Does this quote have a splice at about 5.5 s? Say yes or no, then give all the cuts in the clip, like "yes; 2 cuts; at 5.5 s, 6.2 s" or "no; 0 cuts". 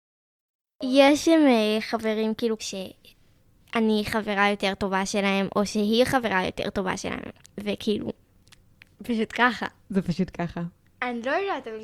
no; 2 cuts; at 2.6 s, 10.8 s